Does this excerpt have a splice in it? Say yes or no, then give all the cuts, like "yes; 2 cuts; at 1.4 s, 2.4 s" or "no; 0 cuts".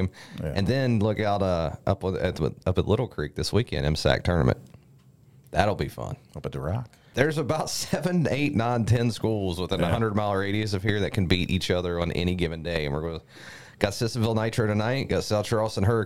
yes; 1 cut; at 7.1 s